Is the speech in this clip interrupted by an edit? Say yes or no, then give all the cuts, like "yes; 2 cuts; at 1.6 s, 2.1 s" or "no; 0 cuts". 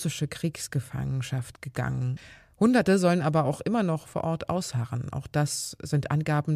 no; 0 cuts